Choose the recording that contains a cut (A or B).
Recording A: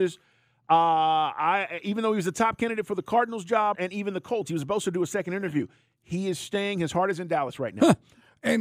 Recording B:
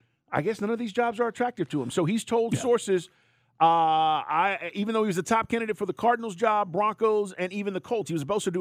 A